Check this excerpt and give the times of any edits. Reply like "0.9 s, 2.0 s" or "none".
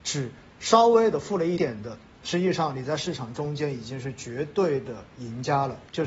1.6 s